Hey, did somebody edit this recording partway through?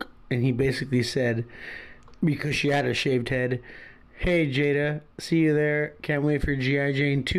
no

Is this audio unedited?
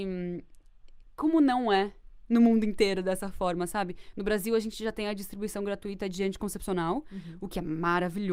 yes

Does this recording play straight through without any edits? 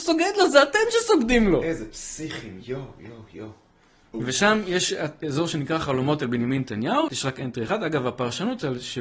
no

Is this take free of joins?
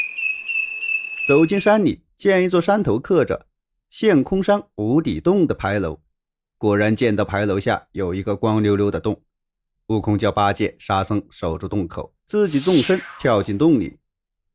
no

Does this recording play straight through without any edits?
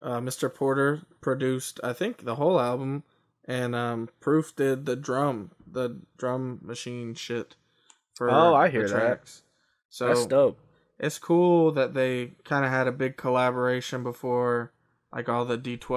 yes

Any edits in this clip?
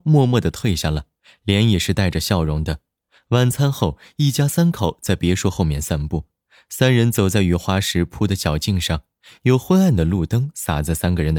no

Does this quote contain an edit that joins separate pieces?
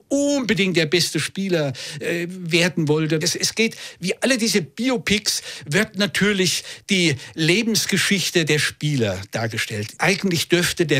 yes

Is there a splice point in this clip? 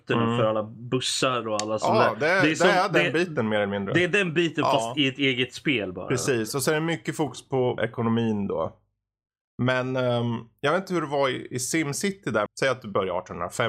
yes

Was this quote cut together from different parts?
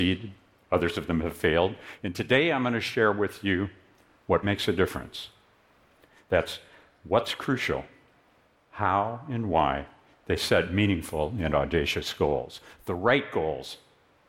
yes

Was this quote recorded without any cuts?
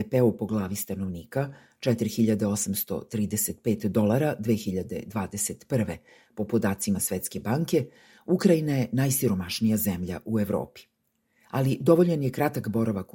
yes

